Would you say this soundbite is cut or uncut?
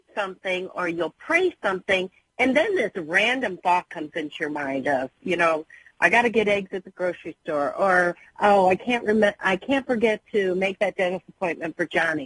uncut